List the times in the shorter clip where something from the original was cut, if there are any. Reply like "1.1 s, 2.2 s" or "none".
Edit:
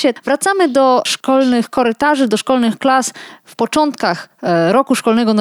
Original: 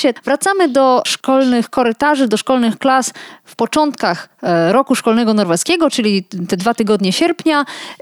none